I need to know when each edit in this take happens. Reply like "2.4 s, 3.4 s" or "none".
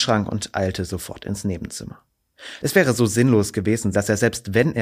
2.6 s, 3.9 s

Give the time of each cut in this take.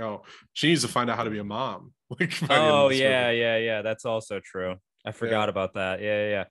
none

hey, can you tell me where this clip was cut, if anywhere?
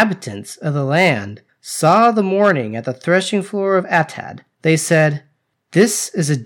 1.5 s, 4.5 s

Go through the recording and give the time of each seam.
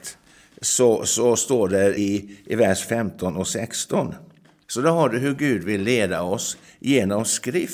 2.0 s, 4.6 s

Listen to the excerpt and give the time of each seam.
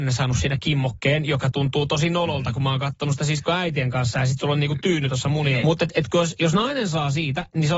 5.6 s

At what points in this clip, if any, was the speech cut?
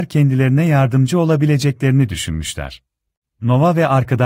3.2 s

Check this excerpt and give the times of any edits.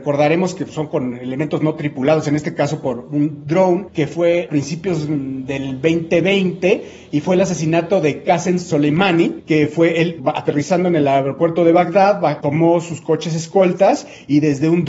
12.4 s

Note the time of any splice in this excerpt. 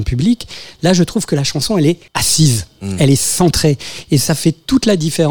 2.1 s

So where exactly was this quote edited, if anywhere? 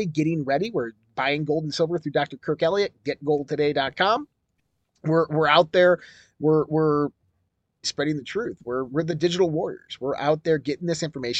7.8 s

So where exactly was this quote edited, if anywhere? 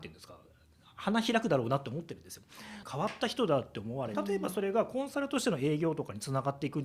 2.8 s, 4.1 s

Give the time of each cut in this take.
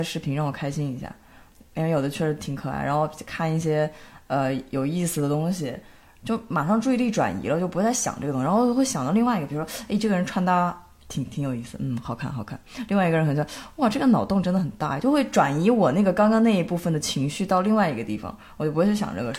none

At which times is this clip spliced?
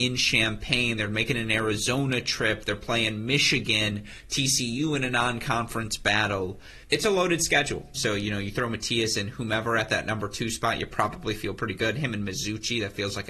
6.8 s, 7.9 s

